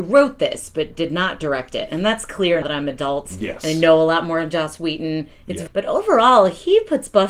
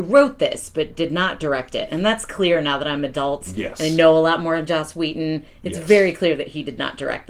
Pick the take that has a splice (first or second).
first